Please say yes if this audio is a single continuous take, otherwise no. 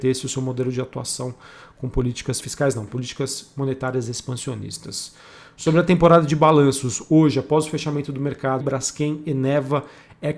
no